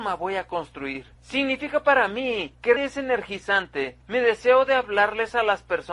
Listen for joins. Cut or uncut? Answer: cut